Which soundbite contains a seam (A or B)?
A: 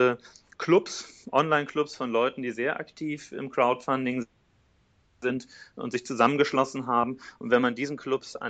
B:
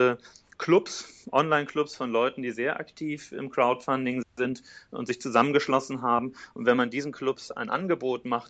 B